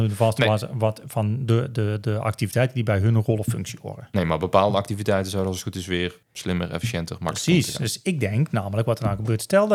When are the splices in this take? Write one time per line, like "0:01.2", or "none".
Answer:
0:06.2